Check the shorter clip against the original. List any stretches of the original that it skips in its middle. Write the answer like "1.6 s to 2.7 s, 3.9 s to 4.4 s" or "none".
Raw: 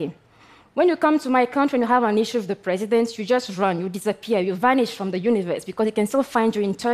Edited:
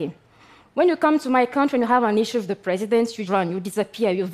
3.3 s to 3.6 s